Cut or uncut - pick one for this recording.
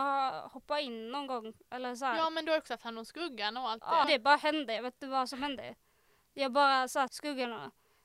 cut